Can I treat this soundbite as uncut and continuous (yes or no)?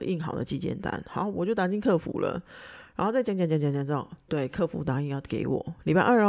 yes